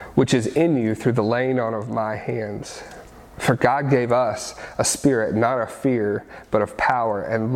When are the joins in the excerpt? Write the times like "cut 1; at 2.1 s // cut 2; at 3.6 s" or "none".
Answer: none